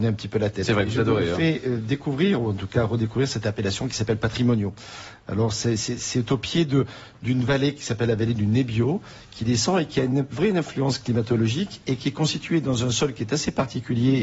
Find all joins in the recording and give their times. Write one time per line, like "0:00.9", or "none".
none